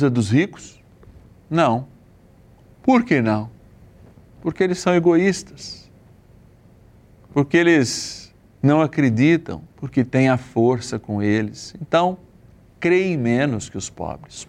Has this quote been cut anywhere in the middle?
yes; 1 cut; at 9.7 s

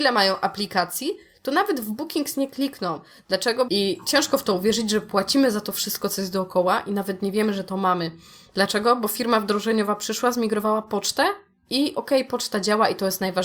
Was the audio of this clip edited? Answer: yes; 1 cut; at 3.7 s

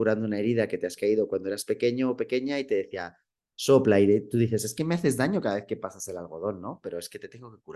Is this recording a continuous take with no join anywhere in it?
yes; 0 cuts

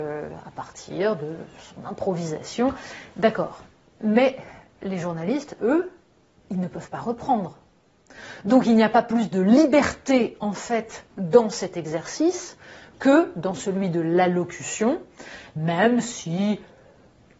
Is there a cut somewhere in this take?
no; 0 cuts

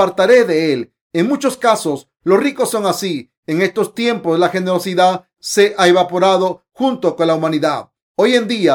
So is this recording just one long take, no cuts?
yes; 0 cuts

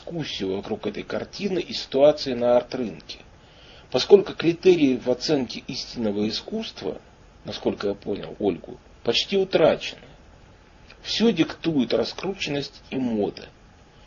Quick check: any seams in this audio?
no; 0 cuts

